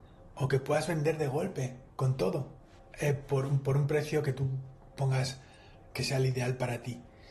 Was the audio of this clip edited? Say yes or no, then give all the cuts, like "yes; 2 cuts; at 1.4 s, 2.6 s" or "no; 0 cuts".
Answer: yes; 2 cuts; at 2.8 s, 5.9 s